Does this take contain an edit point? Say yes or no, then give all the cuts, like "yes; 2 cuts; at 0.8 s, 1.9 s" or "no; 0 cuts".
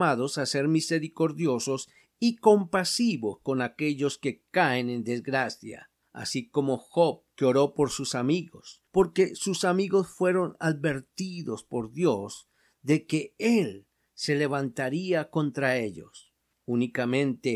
no; 0 cuts